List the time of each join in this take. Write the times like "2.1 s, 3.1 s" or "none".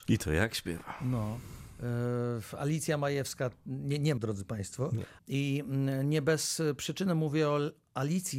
4.2 s, 5.2 s

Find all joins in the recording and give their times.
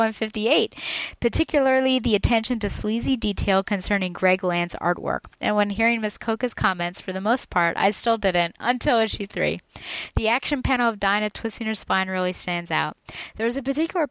5.3 s

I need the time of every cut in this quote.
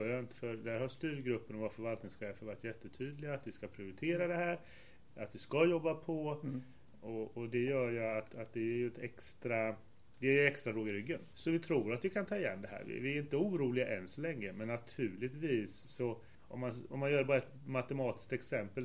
11.3 s

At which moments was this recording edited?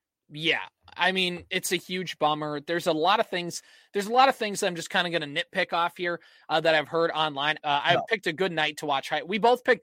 7.6 s

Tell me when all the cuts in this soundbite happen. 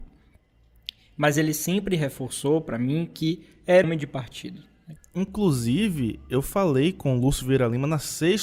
3.8 s, 5.0 s

